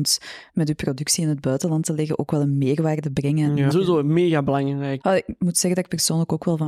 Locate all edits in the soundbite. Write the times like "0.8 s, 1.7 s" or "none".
3.7 s, 5.0 s